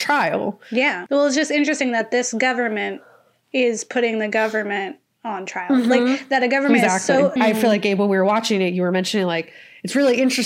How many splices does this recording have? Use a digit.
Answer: 2